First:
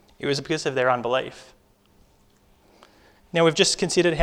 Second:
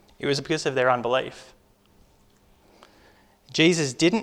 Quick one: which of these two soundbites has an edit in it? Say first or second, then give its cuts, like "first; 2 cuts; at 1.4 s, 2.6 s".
first; 1 cut; at 3.2 s